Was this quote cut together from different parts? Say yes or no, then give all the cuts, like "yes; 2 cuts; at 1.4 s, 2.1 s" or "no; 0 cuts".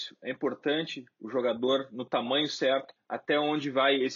yes; 1 cut; at 3.0 s